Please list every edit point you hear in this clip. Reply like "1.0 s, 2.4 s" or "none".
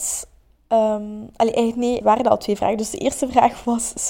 2.0 s